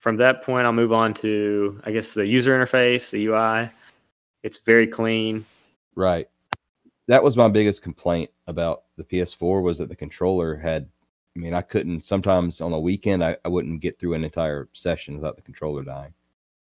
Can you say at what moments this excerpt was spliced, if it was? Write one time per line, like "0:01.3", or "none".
0:05.7